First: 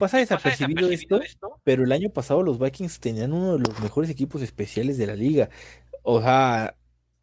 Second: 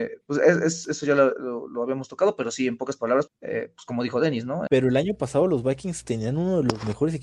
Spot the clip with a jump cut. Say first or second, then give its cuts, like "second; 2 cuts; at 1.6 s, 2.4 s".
second; 2 cuts; at 3.3 s, 4.7 s